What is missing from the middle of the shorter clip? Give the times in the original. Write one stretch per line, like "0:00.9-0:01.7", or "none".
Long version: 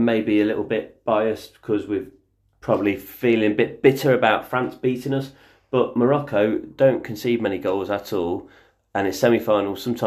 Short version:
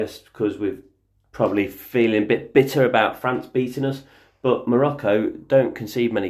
none